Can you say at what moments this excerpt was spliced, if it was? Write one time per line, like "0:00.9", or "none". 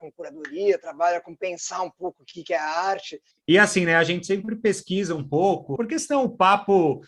0:03.3
0:05.8

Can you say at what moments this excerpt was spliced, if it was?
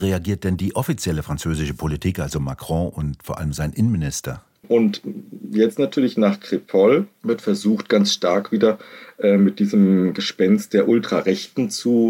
0:04.6

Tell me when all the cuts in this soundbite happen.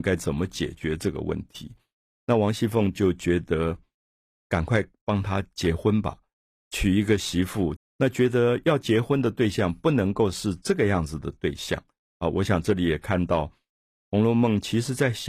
0:07.8

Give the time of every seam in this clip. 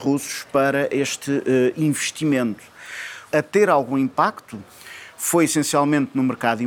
0:03.3

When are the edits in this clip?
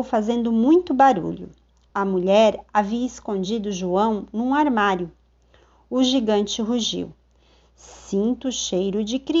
none

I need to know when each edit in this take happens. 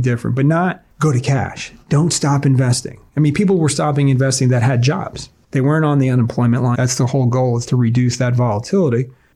0:06.7

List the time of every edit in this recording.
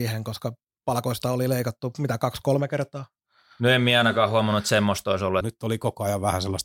0:05.4

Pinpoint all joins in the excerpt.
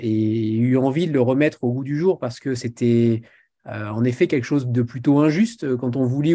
none

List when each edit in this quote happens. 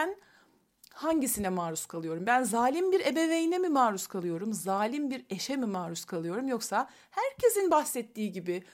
none

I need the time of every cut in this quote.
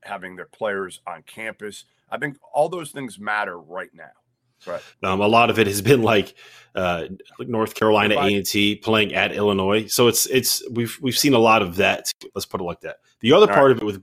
0:04.6
0:12.3

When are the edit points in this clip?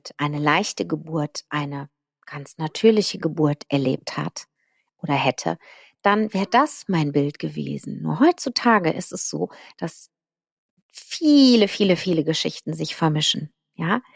none

